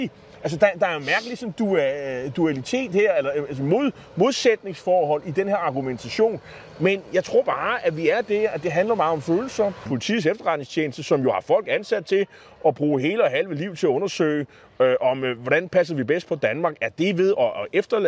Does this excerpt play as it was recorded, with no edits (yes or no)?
no